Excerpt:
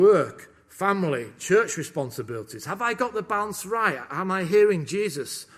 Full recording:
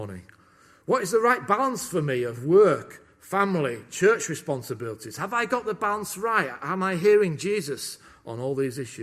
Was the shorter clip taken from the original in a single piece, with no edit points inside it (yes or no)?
yes